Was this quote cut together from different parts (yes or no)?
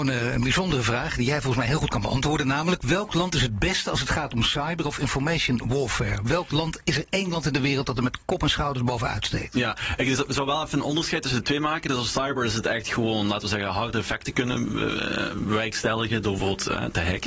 no